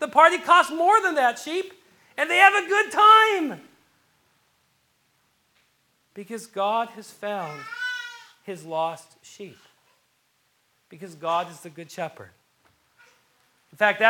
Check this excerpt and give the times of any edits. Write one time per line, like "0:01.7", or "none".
none